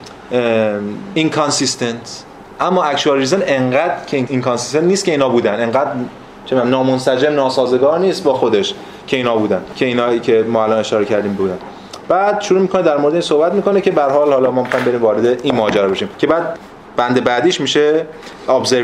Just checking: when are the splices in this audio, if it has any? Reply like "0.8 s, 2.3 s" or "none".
1.2 s, 4.3 s